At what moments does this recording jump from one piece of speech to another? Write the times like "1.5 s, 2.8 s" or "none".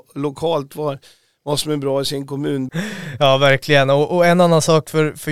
2.7 s